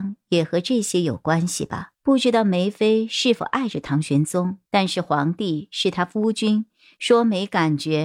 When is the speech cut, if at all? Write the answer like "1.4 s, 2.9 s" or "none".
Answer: 1.9 s, 4.7 s